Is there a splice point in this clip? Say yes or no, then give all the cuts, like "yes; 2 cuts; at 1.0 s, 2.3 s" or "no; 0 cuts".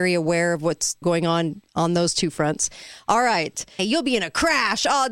yes; 2 cuts; at 1.0 s, 3.8 s